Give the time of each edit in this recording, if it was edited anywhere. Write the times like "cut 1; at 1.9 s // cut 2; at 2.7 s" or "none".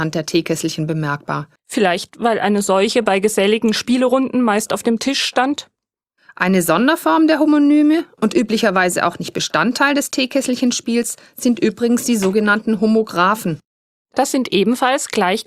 cut 1; at 1.6 s